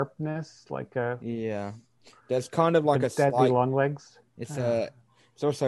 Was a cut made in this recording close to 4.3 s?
yes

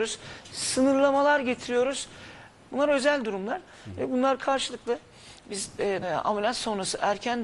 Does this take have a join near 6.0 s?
yes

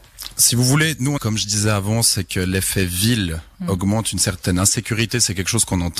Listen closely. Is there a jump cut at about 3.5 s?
no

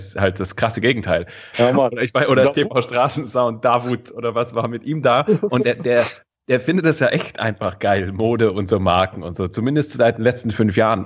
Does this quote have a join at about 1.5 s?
yes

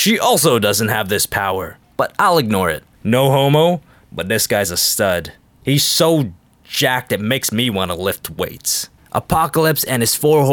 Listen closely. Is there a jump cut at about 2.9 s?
yes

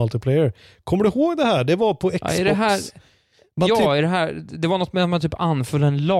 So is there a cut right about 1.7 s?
no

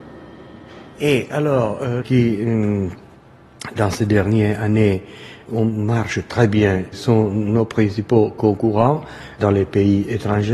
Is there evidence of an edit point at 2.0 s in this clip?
yes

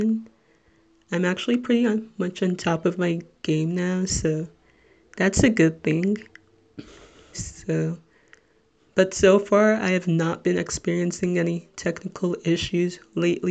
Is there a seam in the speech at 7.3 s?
yes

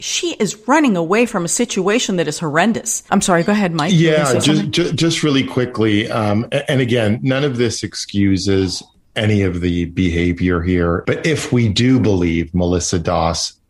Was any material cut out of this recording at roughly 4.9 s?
no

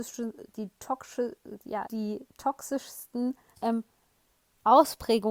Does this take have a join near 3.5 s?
yes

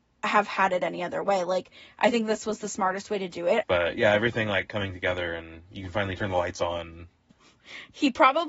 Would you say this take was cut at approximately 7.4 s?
yes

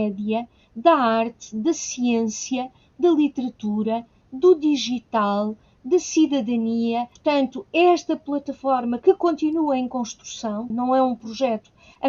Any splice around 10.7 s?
yes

